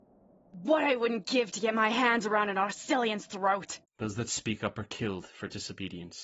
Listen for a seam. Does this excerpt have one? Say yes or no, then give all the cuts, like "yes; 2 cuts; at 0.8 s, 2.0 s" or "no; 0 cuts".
yes; 1 cut; at 3.8 s